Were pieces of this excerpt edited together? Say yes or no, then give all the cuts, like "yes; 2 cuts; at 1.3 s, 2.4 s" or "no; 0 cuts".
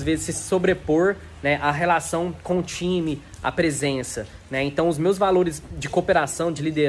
no; 0 cuts